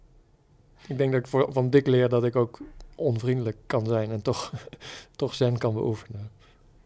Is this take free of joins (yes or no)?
yes